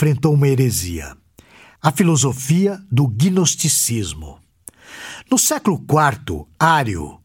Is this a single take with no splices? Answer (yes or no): yes